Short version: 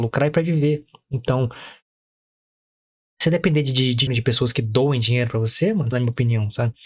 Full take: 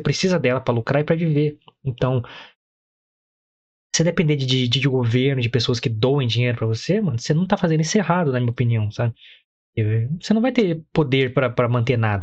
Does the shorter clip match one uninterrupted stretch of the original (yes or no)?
no